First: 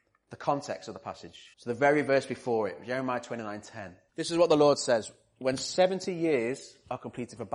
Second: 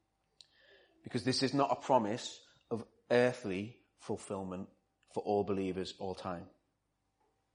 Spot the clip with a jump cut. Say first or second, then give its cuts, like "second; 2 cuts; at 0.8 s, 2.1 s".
first; 1 cut; at 1.5 s